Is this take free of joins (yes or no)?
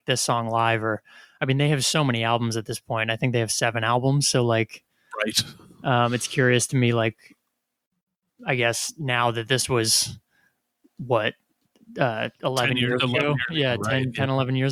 yes